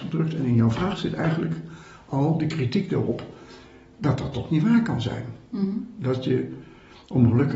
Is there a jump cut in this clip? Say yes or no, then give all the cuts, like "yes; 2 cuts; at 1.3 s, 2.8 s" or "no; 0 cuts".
no; 0 cuts